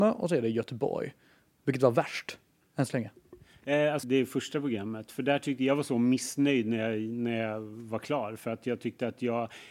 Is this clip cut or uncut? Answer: cut